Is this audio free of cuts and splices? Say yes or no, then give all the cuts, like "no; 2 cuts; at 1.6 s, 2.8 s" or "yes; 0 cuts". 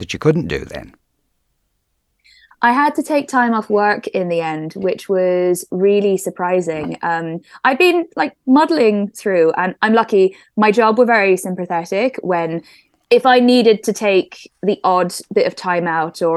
yes; 0 cuts